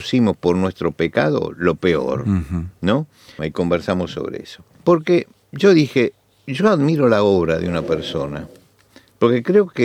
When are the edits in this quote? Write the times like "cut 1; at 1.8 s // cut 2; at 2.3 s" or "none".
cut 1; at 3.4 s // cut 2; at 4.8 s